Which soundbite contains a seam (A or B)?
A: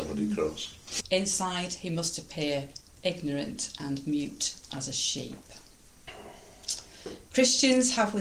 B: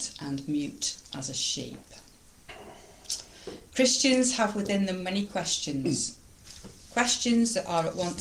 A